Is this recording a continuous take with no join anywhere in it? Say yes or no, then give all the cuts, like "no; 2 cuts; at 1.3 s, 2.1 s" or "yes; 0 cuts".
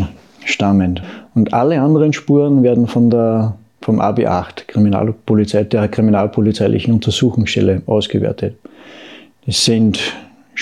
yes; 0 cuts